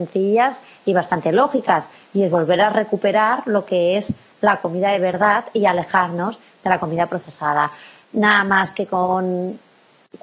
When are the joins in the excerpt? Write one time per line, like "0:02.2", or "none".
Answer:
none